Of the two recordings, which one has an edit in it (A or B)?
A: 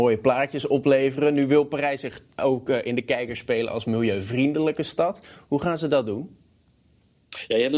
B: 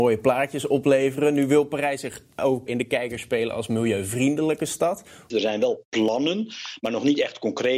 B